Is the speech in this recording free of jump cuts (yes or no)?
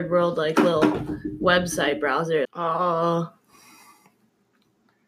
no